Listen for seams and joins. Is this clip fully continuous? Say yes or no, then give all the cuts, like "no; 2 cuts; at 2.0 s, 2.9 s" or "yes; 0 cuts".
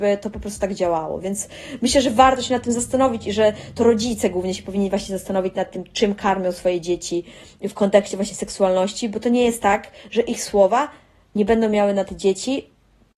yes; 0 cuts